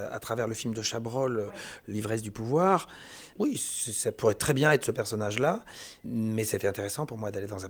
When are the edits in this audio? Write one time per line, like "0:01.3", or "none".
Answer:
0:03.3
0:06.0